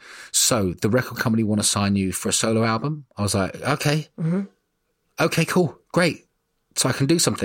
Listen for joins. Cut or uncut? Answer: uncut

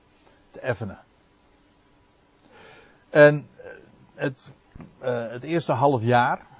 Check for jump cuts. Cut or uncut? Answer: cut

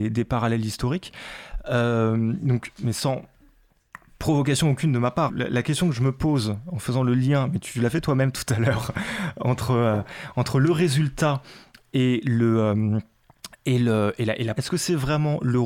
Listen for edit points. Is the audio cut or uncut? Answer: cut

